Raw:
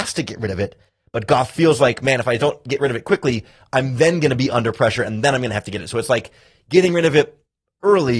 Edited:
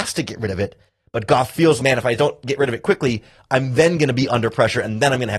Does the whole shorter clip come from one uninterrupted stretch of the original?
no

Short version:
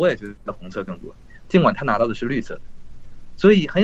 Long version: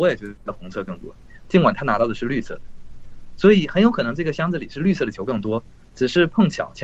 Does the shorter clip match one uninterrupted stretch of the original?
yes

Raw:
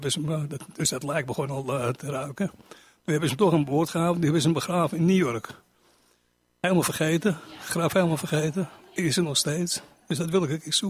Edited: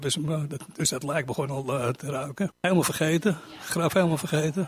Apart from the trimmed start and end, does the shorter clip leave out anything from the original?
yes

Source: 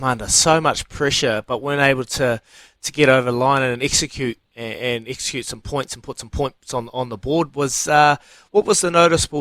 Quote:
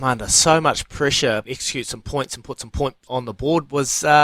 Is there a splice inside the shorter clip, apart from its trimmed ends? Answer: yes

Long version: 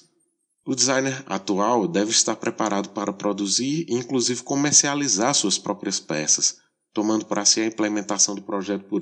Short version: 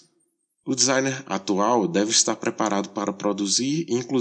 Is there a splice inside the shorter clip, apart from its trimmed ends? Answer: no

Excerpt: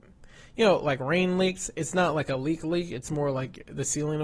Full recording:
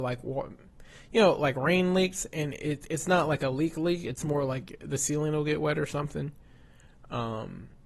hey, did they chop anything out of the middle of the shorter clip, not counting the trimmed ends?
yes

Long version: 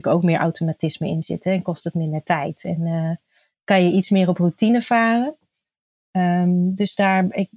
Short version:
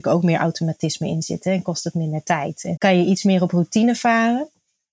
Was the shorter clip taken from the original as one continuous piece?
no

